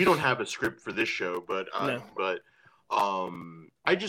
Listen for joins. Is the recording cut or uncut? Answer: cut